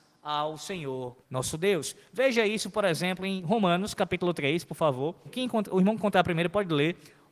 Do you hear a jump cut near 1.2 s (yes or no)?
yes